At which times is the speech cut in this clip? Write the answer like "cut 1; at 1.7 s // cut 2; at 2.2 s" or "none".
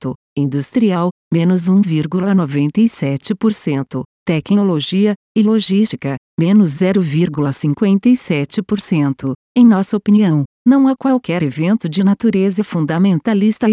cut 1; at 5.2 s